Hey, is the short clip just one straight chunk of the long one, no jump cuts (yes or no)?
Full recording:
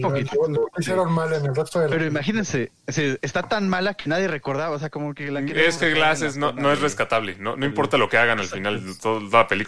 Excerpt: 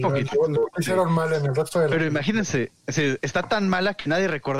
yes